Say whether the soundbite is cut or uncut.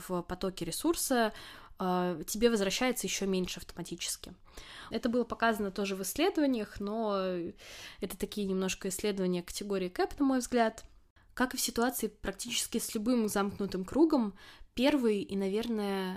cut